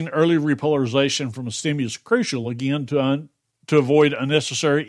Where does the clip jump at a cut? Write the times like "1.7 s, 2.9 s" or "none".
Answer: none

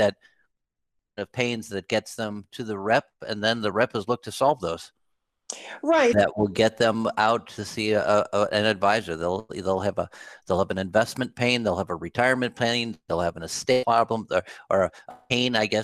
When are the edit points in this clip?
6.1 s

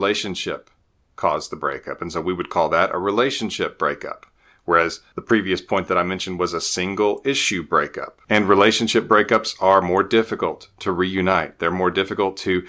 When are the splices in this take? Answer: none

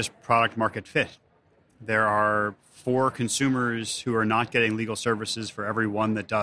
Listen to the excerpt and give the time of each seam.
none

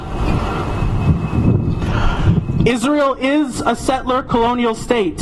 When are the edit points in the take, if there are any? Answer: none

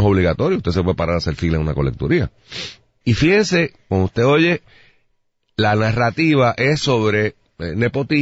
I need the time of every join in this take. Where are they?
3.0 s

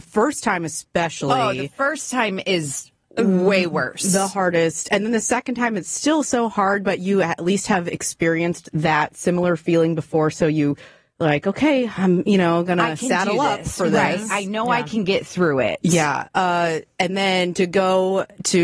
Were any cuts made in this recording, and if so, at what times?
none

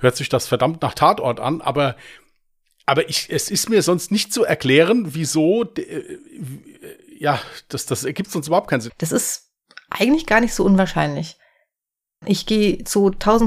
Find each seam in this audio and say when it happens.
8.9 s, 12.2 s

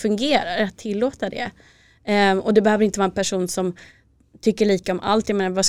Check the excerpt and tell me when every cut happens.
none

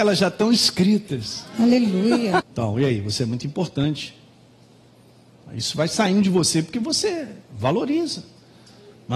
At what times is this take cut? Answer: 2.4 s

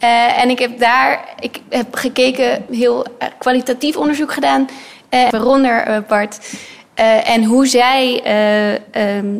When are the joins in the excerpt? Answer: 2.7 s, 5.3 s

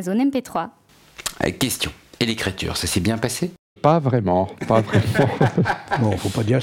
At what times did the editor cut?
3.8 s

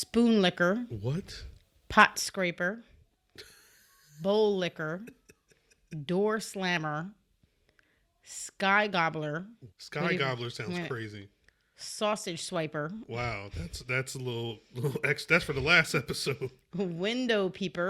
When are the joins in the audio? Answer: 9.7 s

